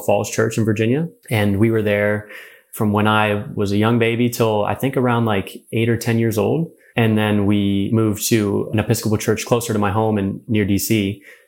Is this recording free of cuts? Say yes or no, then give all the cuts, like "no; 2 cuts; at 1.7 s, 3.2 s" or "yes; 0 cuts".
yes; 0 cuts